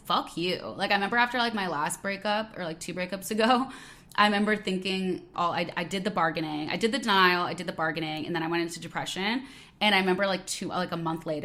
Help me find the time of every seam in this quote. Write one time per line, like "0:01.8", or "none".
0:05.3